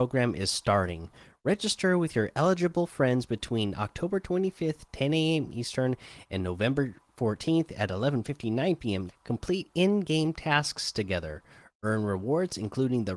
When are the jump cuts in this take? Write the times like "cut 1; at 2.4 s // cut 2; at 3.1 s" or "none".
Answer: cut 1; at 9.1 s